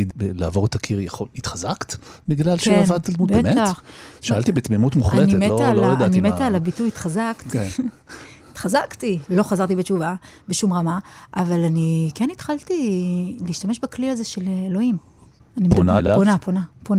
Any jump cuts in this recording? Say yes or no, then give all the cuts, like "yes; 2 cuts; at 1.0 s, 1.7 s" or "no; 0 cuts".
no; 0 cuts